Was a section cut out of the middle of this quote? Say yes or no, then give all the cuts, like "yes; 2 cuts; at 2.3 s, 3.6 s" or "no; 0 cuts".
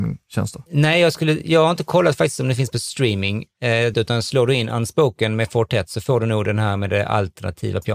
yes; 1 cut; at 3.9 s